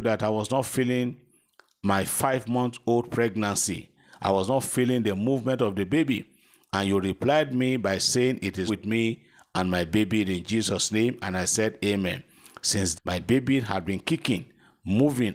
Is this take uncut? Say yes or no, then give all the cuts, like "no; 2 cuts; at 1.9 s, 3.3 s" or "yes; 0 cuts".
no; 2 cuts; at 8.7 s, 12.9 s